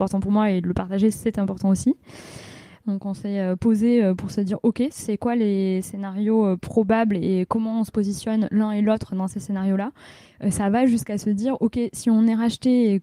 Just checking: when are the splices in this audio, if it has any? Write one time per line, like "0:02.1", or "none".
0:02.8